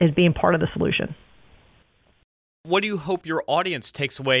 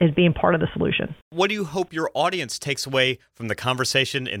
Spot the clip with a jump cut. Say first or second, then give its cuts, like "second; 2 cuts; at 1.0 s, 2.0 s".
second; 1 cut; at 1.2 s